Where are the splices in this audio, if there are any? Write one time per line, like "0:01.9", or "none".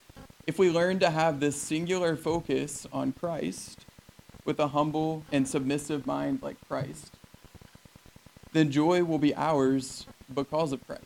0:05.2